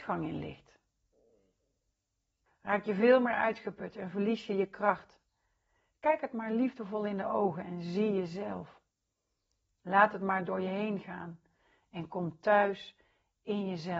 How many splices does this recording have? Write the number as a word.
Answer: one